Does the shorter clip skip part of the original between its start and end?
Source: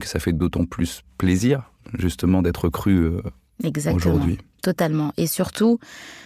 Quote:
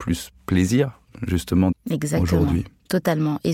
yes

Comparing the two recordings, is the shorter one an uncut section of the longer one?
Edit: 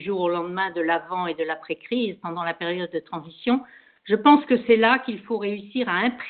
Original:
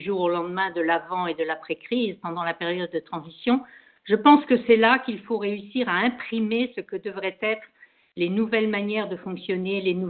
yes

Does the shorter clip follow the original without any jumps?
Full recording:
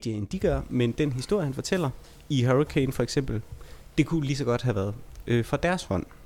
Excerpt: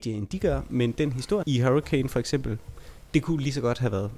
no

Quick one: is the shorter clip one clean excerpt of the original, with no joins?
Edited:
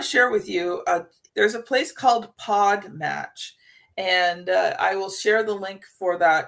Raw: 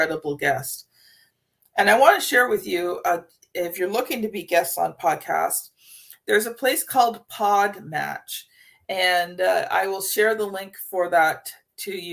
no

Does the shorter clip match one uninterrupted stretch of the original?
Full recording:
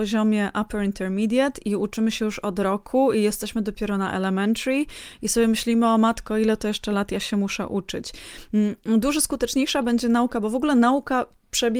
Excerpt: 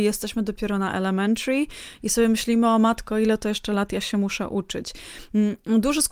yes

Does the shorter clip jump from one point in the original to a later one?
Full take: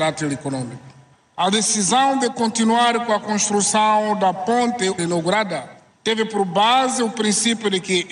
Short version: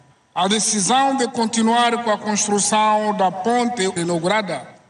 no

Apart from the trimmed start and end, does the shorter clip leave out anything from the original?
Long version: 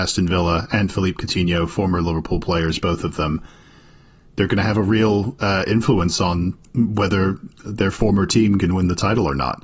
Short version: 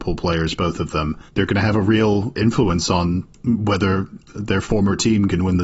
yes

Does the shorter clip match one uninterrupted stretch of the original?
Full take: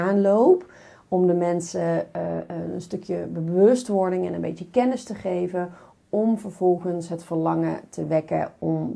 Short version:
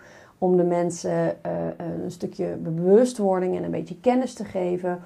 yes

